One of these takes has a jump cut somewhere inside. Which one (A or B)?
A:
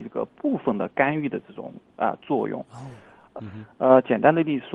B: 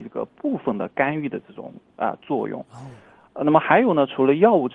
A